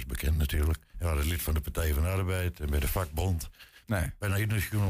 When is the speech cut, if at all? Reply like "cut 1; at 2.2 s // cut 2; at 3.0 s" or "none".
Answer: cut 1; at 0.9 s // cut 2; at 3.8 s